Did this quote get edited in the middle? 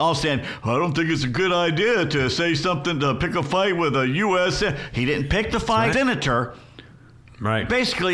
yes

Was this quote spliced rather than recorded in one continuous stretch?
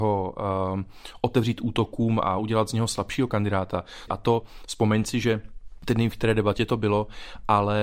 yes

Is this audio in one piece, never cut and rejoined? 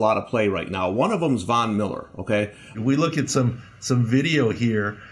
no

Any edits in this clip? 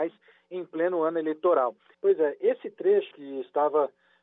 yes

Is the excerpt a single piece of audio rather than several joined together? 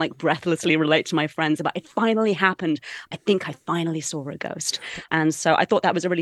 no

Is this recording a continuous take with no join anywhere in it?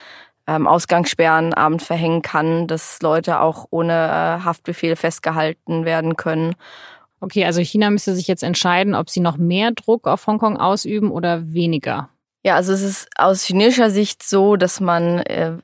no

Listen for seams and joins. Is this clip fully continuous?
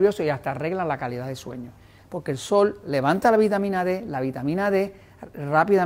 no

